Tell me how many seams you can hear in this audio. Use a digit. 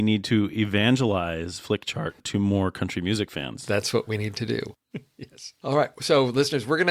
2